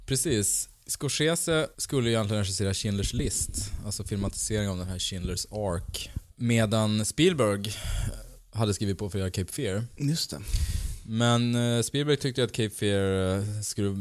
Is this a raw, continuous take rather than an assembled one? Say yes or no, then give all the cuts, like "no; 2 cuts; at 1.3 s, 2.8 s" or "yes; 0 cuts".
yes; 0 cuts